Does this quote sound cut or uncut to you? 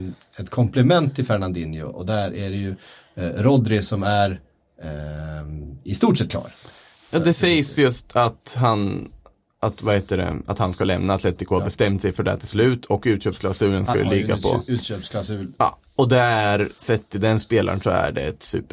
cut